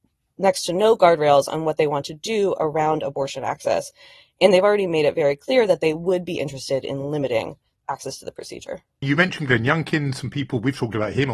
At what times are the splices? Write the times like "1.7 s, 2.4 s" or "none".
9.0 s